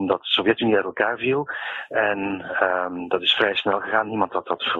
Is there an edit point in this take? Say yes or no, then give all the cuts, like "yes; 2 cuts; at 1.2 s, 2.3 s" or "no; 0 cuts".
no; 0 cuts